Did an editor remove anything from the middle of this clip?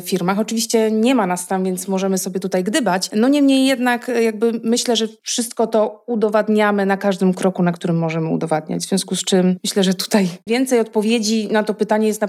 yes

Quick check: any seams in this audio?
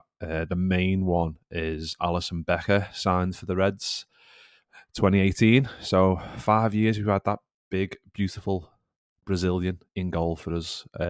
no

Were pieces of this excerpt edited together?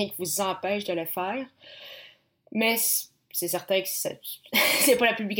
no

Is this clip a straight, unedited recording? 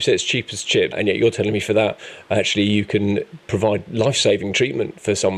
no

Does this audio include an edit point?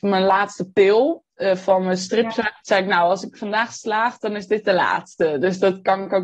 yes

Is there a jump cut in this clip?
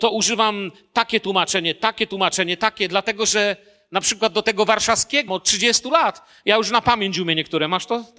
yes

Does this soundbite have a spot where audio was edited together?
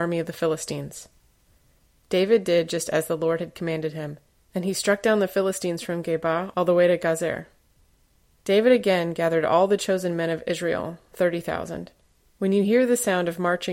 yes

